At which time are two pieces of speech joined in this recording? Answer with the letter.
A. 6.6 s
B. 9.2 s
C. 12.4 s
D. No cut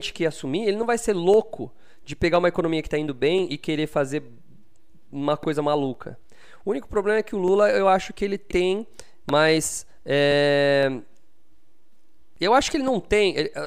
B